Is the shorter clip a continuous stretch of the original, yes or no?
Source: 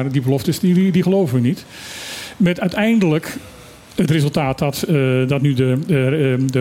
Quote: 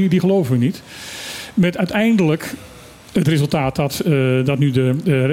yes